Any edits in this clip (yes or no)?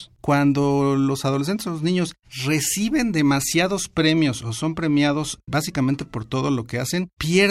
no